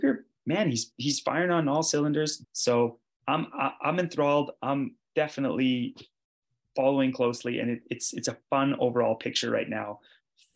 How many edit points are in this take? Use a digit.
1